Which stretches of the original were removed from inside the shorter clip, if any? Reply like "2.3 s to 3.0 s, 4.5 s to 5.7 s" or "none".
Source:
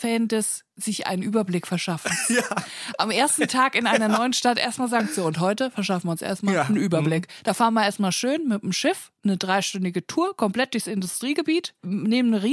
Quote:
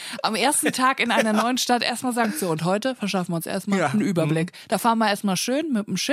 none